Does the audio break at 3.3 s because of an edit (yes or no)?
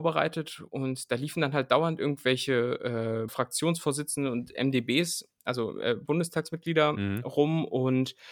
yes